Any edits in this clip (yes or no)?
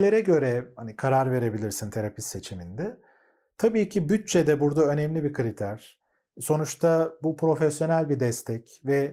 no